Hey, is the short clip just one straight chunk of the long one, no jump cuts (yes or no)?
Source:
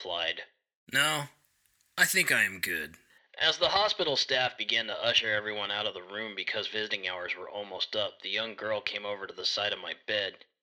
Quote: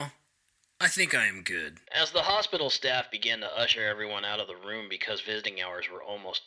no